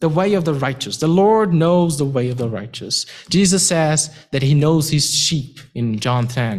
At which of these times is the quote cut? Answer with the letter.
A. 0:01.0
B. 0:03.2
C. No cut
C